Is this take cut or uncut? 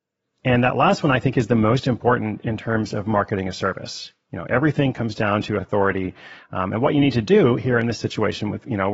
uncut